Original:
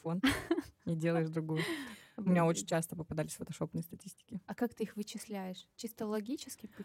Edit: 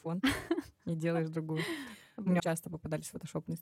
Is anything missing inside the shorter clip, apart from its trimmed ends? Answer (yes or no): yes